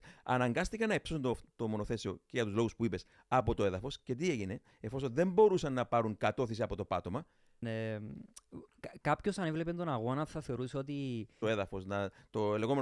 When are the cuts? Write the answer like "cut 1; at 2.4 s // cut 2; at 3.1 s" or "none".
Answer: cut 1; at 7.6 s // cut 2; at 11.4 s